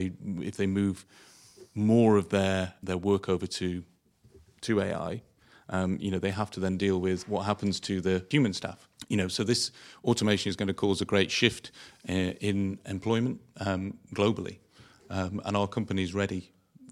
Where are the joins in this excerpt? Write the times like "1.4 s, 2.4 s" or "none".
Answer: none